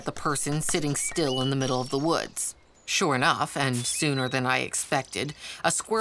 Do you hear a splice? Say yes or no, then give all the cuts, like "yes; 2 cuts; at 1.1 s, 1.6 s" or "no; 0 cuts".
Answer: no; 0 cuts